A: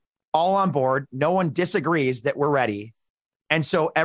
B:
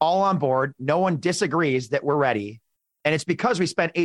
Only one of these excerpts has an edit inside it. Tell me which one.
B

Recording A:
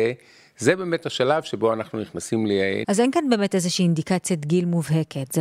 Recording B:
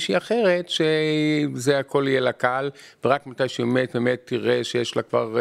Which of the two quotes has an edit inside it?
A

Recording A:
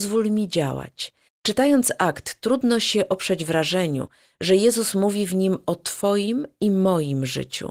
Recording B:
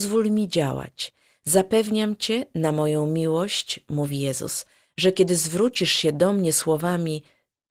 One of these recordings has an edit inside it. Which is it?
A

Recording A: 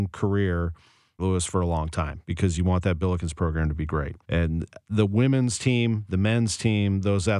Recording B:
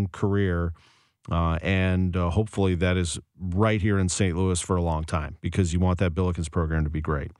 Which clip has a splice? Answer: A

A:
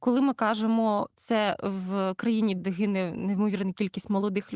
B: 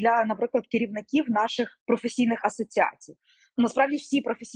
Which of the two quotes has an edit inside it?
A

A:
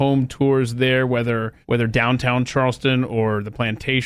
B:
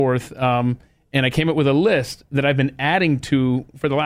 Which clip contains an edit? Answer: A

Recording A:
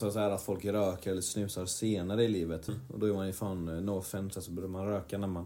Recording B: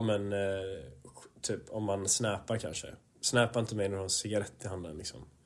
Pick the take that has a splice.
A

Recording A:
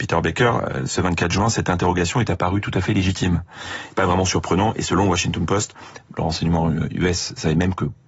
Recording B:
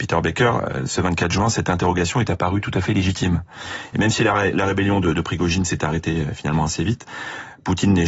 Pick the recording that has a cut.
A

